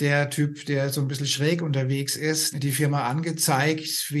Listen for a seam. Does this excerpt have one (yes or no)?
yes